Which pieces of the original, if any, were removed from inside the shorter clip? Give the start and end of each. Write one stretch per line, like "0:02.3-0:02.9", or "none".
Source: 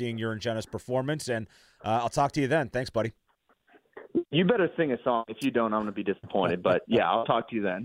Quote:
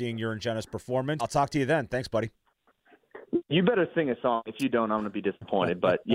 0:01.2-0:02.0